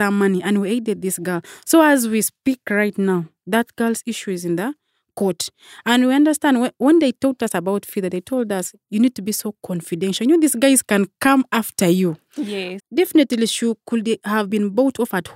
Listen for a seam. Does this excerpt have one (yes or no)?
yes